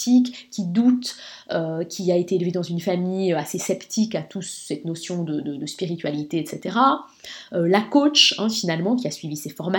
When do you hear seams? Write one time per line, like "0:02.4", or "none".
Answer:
none